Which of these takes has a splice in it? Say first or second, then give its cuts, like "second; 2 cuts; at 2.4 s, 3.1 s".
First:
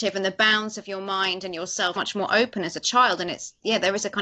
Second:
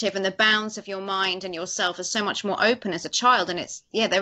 first; 1 cut; at 2.0 s